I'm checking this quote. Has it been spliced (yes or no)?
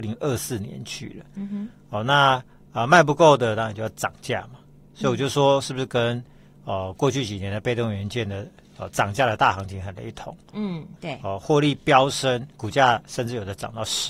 yes